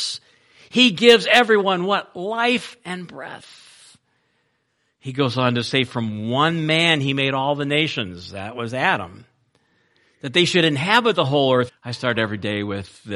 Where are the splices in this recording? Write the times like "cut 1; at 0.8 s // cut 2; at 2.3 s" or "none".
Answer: cut 1; at 11.7 s